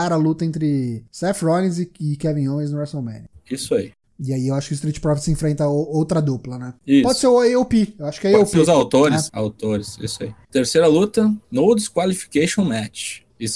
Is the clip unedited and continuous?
no; 1 cut; at 9.3 s

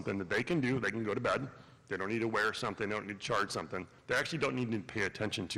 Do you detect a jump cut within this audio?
no; 0 cuts

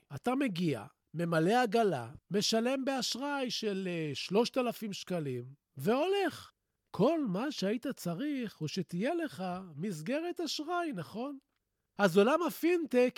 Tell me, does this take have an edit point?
no; 0 cuts

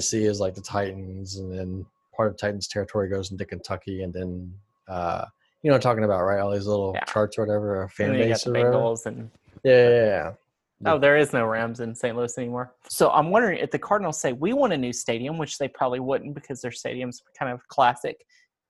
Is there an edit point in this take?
yes; 1 cut; at 12.9 s

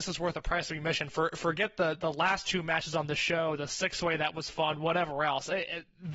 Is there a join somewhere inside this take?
no; 0 cuts

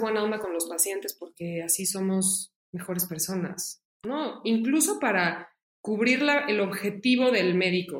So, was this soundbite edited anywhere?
no; 0 cuts

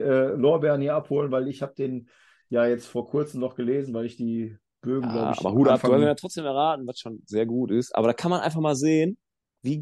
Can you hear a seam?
no; 0 cuts

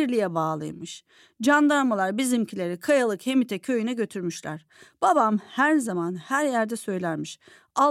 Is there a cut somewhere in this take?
no; 0 cuts

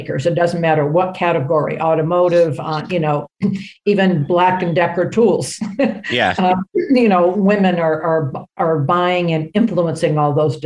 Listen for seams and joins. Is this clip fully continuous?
yes; 0 cuts

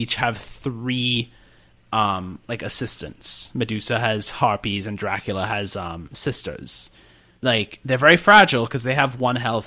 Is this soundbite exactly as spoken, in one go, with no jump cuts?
yes; 0 cuts

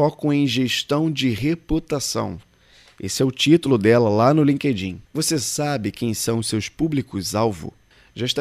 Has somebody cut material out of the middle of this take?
yes; 1 cut; at 5.0 s

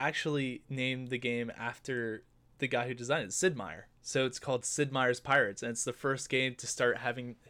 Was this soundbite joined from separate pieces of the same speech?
no; 0 cuts

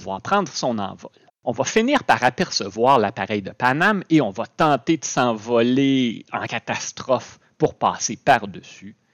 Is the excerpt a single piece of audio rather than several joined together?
no; 1 cut; at 1.3 s

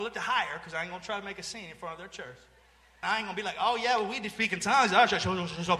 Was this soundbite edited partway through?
yes; 1 cut; at 3.0 s

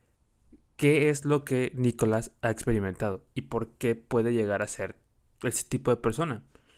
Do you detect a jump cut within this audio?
no; 0 cuts

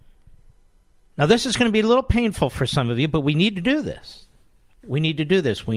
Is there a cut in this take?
no; 0 cuts

